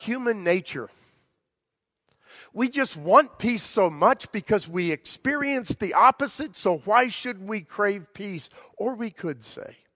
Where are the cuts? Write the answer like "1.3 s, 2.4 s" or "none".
none